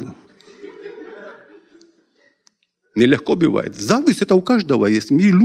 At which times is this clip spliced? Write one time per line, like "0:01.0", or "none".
none